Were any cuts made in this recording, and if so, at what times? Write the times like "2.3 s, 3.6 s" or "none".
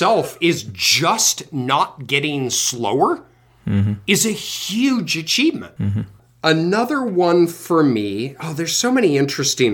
none